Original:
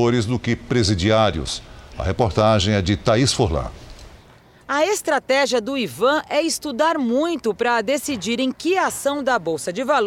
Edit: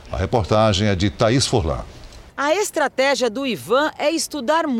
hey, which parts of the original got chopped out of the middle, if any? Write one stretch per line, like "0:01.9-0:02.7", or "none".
0:04.2-0:04.6